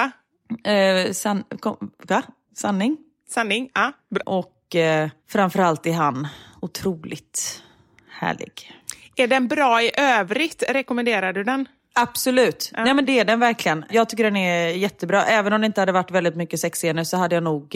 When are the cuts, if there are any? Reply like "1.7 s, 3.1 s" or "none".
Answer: 4.2 s